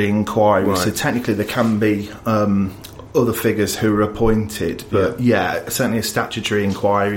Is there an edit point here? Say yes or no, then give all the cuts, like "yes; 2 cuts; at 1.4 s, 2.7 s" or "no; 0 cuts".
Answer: no; 0 cuts